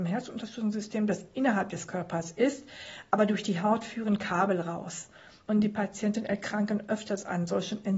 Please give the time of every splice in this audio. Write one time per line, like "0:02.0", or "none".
none